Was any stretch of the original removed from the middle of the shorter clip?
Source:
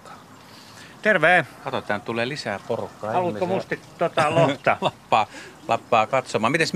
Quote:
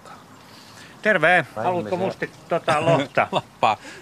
yes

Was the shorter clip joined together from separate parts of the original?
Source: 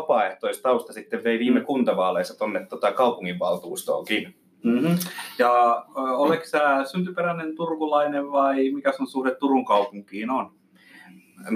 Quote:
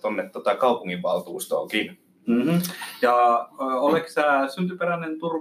no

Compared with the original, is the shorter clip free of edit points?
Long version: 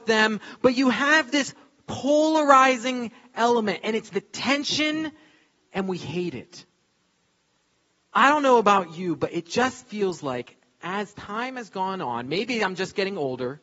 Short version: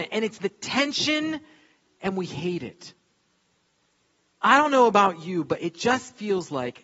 yes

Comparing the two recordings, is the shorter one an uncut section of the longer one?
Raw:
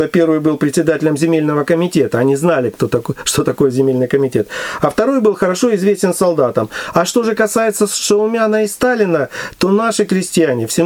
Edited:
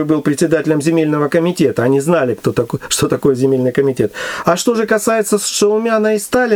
no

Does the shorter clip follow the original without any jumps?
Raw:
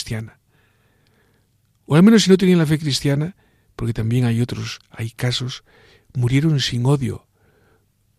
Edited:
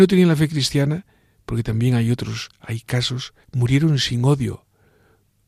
no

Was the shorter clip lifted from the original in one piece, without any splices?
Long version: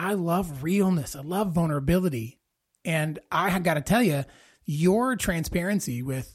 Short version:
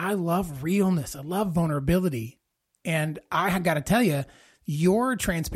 yes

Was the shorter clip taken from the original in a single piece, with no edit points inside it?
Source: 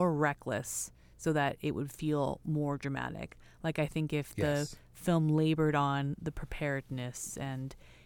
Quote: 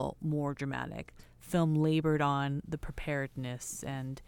no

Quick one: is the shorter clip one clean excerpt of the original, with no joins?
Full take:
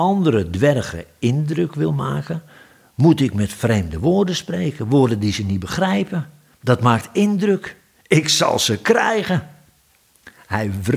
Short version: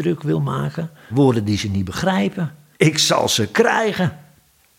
no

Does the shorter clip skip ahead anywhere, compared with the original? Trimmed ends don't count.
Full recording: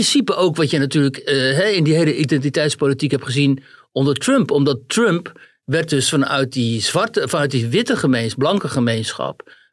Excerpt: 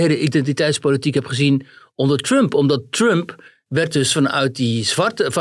no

